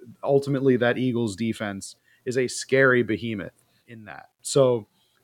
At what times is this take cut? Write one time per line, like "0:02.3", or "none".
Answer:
0:03.8